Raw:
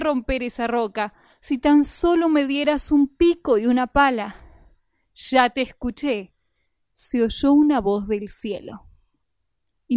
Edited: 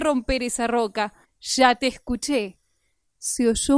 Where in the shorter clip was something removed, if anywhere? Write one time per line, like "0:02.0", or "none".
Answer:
0:01.2